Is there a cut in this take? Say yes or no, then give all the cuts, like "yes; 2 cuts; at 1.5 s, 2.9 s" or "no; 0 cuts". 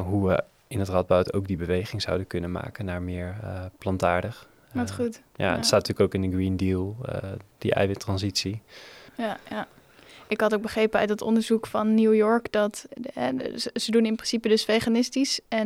yes; 3 cuts; at 7.6 s, 9.1 s, 12.9 s